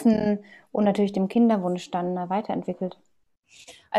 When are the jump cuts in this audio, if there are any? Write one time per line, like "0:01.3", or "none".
none